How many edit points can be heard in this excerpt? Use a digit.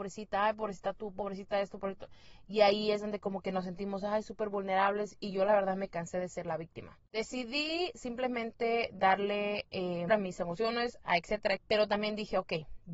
2